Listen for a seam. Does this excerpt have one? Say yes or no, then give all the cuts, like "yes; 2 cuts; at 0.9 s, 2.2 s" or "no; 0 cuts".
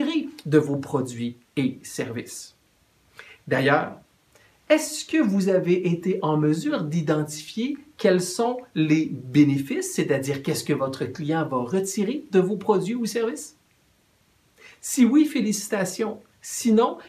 no; 0 cuts